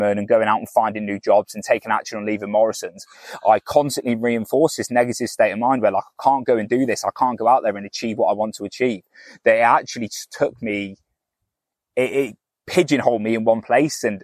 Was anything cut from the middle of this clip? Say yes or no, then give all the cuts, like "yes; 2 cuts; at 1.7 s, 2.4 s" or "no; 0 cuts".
no; 0 cuts